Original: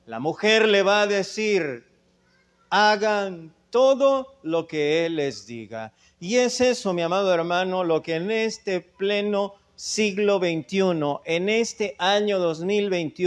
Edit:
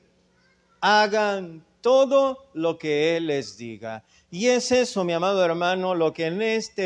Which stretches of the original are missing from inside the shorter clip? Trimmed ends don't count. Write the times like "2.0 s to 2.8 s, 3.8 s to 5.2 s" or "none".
none